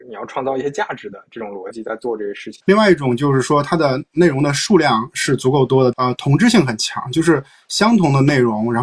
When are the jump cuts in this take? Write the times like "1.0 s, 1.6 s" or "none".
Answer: 2.6 s, 5.9 s